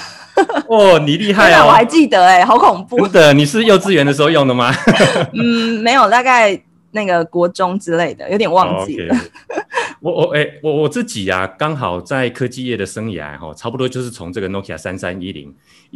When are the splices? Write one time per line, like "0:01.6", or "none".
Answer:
none